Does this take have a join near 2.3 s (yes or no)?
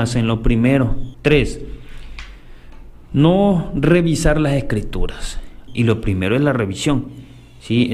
no